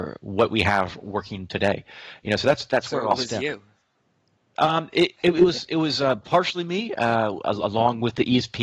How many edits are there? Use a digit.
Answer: 0